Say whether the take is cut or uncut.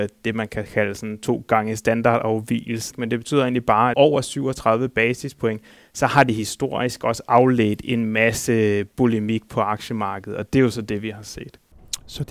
cut